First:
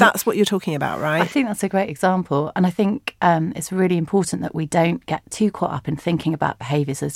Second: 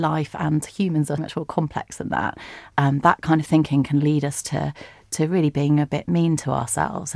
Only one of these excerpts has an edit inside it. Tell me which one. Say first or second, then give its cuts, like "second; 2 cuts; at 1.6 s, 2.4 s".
second; 1 cut; at 1.2 s